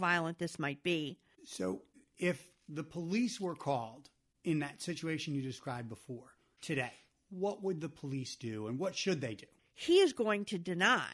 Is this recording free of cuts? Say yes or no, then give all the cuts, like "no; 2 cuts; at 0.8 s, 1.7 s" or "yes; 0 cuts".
no; 2 cuts; at 1.3 s, 9.6 s